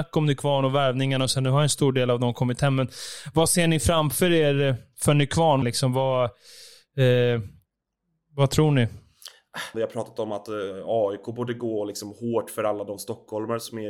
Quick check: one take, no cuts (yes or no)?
no